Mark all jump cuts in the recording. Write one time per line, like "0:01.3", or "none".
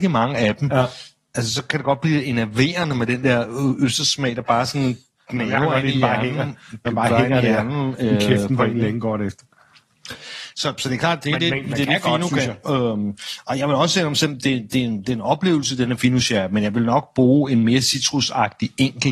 none